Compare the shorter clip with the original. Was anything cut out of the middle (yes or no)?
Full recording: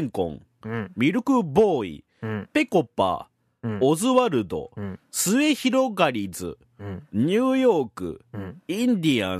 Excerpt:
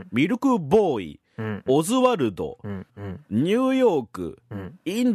yes